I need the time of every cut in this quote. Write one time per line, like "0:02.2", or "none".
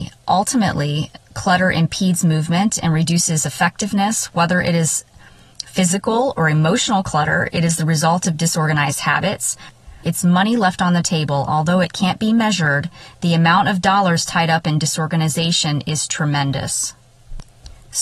0:01.2
0:10.0